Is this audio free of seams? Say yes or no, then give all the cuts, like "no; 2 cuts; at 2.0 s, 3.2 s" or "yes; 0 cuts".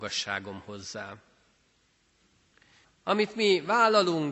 no; 1 cut; at 2.8 s